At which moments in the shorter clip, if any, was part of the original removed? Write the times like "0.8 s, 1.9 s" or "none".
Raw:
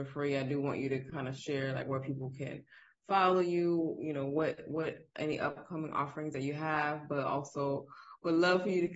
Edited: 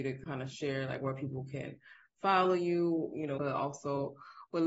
3.4 s